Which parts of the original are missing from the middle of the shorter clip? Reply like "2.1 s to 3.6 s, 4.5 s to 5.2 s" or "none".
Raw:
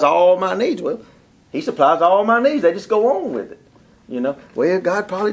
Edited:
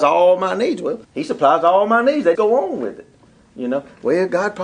1.0 s to 1.4 s, 2.7 s to 2.9 s